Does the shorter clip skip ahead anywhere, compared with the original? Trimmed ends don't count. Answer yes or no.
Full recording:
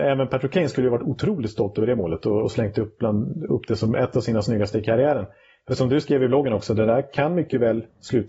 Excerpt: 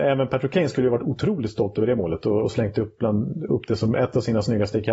no